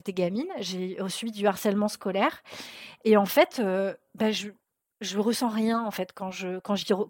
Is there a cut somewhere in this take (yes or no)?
no